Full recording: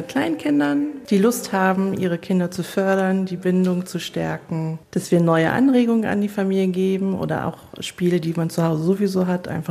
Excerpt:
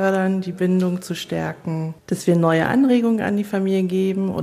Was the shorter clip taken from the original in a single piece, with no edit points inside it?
yes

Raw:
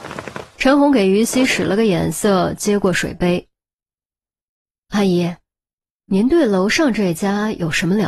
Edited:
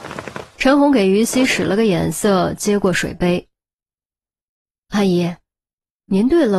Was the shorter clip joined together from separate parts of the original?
no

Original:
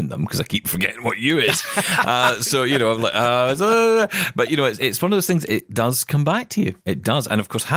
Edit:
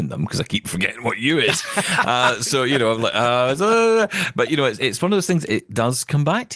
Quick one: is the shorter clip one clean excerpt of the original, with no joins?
yes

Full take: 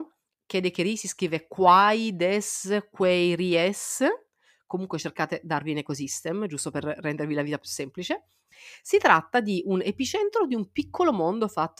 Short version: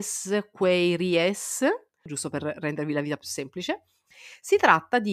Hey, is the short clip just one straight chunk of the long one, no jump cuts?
no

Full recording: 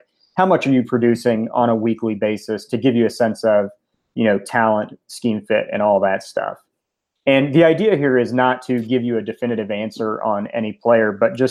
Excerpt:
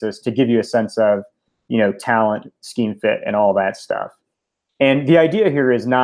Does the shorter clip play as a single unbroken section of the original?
yes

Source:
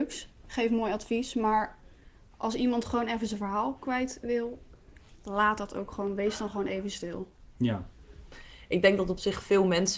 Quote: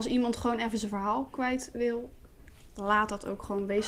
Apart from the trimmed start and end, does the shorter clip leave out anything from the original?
no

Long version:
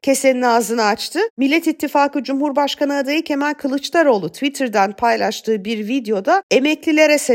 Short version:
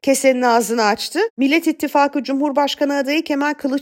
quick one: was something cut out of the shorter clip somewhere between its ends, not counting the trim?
no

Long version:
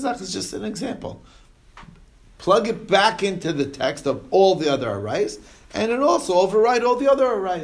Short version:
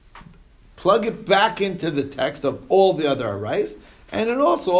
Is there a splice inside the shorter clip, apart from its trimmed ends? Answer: no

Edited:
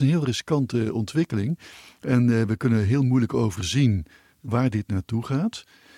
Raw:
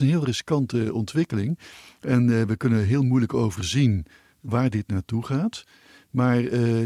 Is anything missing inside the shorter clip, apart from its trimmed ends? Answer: no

